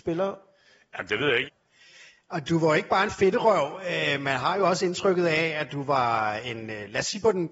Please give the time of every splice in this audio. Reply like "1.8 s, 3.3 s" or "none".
1.4 s